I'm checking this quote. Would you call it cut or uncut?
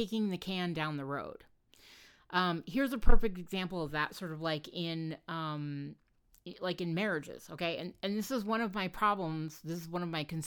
uncut